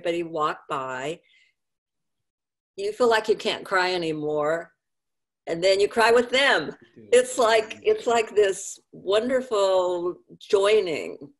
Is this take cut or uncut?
uncut